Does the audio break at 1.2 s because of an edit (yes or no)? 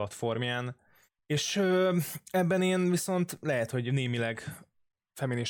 no